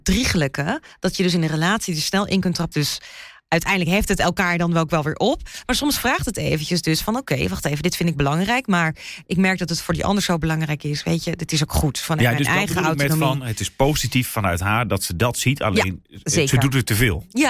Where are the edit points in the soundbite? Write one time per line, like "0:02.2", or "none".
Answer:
0:02.7